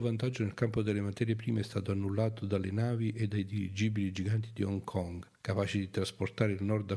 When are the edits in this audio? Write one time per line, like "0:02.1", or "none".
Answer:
0:05.3